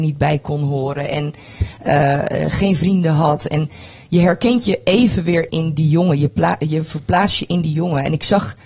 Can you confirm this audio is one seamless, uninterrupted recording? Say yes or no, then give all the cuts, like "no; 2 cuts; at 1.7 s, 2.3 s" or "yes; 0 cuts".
no; 1 cut; at 5.5 s